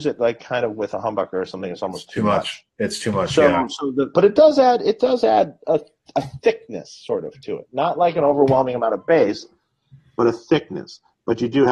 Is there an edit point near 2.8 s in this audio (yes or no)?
no